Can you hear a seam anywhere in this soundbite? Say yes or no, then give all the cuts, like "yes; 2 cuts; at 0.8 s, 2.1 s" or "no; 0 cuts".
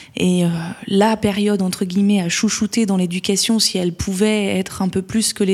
no; 0 cuts